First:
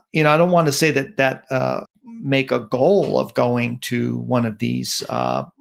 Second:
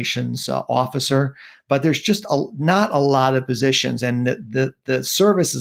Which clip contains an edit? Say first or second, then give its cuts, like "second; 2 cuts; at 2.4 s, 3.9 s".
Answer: first; 1 cut; at 1.9 s